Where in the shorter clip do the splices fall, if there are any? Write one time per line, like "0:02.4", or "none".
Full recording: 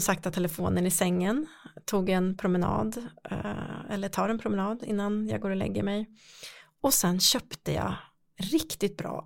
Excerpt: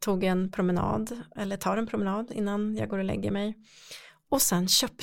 0:01.4

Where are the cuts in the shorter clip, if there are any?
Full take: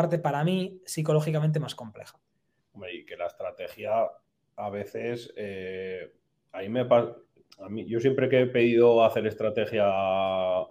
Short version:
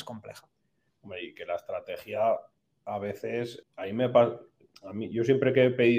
0:03.6

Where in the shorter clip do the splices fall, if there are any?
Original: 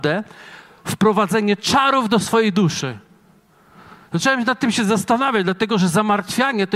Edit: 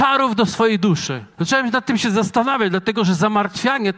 0:01.3

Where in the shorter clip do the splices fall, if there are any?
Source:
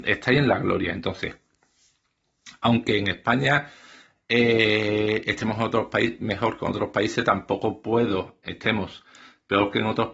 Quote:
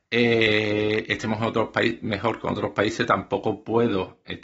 none

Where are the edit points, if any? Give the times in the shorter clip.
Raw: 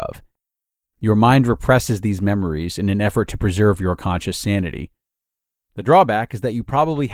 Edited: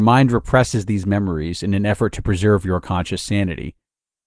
none

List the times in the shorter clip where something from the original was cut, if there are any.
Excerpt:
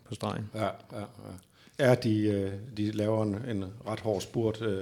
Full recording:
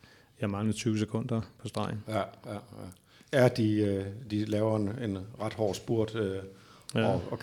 none

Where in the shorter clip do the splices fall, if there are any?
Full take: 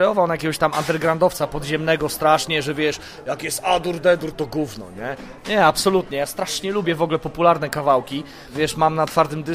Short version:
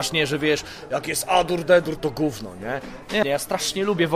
0:03.2

